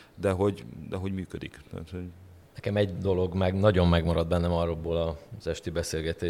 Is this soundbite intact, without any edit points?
yes; 0 cuts

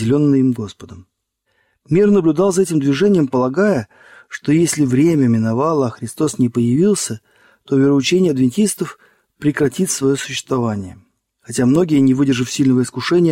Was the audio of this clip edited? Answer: no; 0 cuts

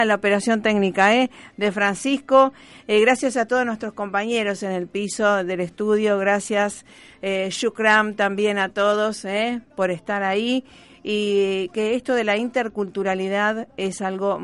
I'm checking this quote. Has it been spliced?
no; 0 cuts

